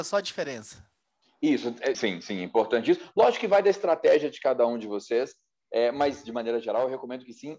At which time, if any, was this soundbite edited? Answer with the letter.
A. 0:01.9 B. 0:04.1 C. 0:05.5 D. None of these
A